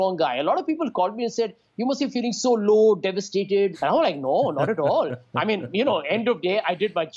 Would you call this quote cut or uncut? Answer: cut